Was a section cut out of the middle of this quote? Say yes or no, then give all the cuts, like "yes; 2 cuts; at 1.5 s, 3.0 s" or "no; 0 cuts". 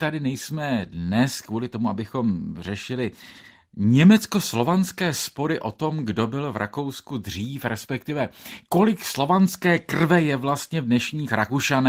no; 0 cuts